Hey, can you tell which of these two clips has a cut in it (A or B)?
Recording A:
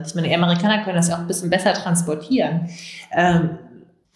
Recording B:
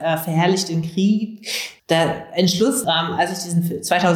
B